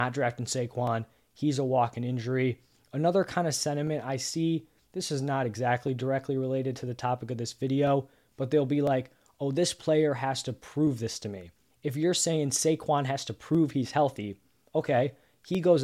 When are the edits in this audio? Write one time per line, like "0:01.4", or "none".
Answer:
0:11.7